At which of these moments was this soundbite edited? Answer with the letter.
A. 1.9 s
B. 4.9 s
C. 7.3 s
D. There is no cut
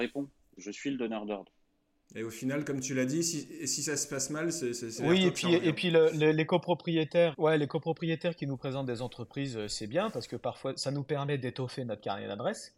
C